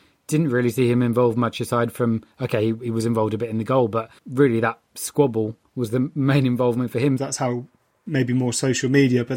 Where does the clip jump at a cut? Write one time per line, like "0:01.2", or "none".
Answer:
0:04.2
0:07.2